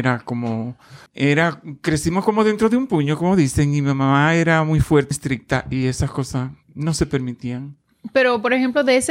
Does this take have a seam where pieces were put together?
yes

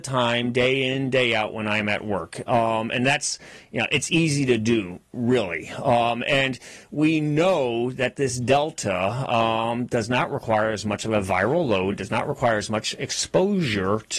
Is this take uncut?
no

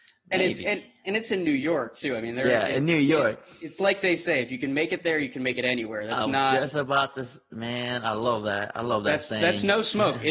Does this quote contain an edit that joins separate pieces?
no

